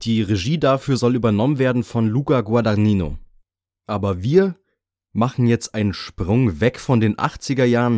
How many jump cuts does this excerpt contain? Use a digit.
0